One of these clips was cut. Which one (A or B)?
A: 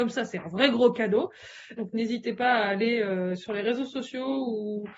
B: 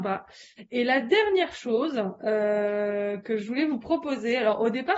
A